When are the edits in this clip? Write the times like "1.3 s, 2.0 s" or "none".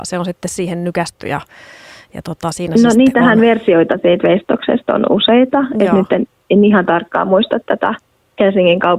none